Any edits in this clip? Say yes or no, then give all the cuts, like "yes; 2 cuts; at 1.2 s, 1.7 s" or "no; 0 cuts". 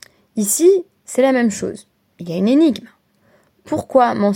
no; 0 cuts